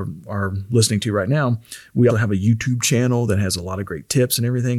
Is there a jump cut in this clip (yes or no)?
yes